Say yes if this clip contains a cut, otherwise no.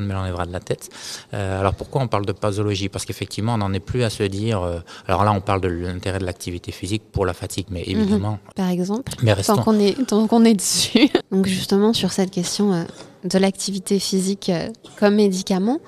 yes